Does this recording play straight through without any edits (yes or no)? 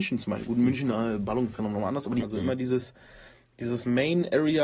no